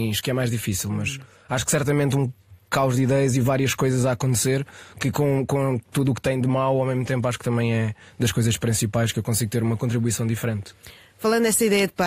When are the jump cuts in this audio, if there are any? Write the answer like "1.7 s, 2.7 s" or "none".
none